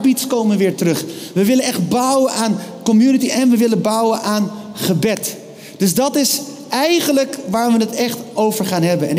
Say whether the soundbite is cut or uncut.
uncut